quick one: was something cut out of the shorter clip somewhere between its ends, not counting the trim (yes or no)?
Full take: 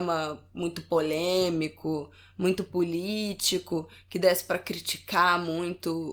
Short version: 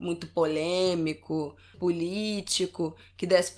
yes